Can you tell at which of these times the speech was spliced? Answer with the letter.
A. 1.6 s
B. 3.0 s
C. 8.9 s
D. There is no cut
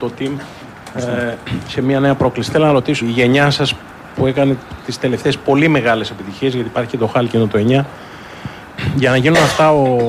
B